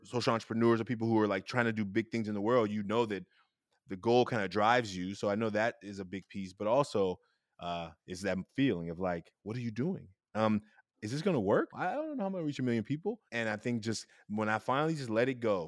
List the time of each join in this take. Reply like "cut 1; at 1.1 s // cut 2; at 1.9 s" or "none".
cut 1; at 11.7 s // cut 2; at 13.3 s